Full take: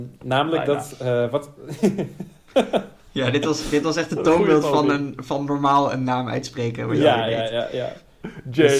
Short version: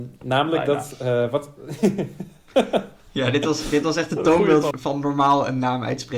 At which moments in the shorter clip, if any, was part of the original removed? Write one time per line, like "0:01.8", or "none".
0:04.7